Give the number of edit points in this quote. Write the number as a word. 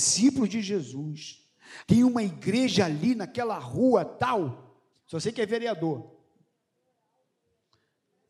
two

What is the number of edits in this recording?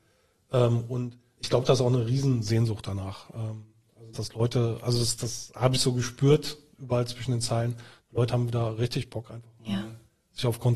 one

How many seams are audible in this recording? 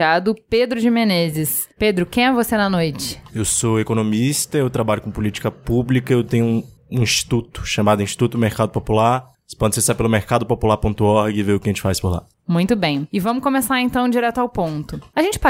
zero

